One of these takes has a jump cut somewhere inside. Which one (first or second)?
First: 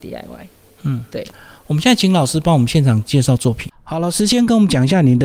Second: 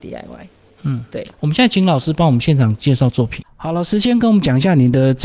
second